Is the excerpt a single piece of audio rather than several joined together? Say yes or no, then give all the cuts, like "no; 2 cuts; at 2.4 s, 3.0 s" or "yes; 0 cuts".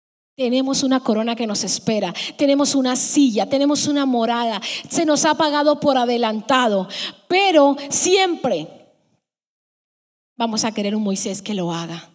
yes; 0 cuts